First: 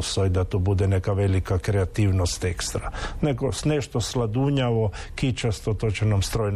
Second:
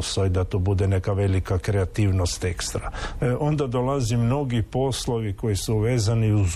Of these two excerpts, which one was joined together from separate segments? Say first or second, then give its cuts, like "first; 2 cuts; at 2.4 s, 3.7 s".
second; 1 cut; at 3.2 s